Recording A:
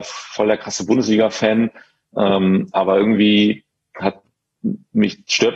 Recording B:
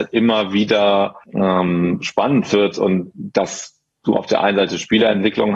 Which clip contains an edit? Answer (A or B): B